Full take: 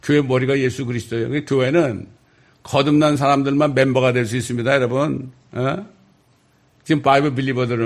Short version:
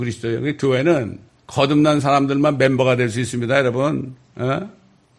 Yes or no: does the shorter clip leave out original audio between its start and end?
yes